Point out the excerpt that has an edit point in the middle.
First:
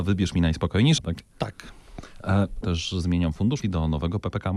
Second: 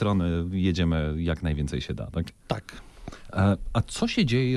first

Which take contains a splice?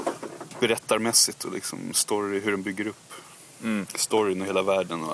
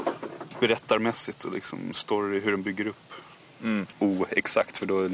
second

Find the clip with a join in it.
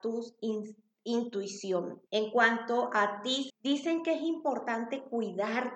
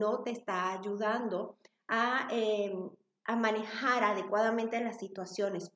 first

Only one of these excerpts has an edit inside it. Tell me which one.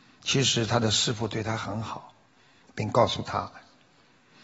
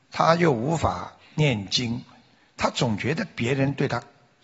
first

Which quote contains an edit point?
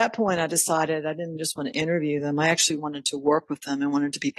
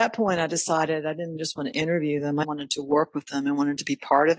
second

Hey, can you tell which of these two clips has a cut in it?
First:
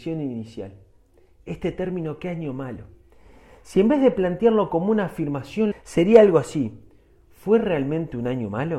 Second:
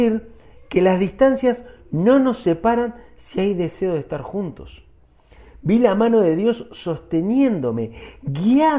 first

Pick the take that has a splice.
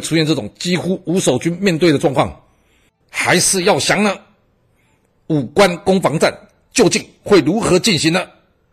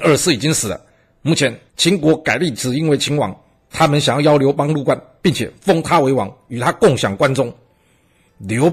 first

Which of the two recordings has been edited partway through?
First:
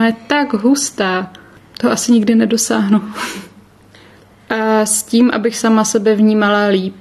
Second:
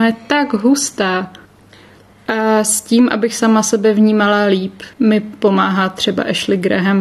second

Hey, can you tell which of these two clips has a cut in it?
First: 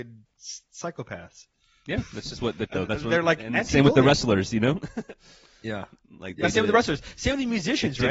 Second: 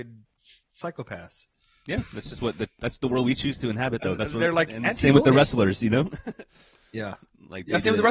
first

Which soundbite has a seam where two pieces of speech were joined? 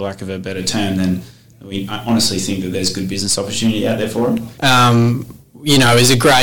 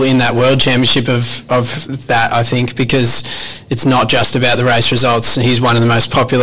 first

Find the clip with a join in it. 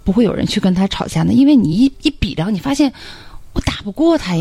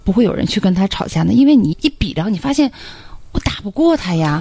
second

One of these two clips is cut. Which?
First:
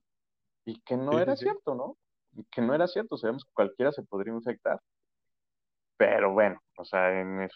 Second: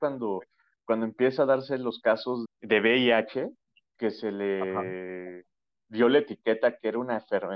second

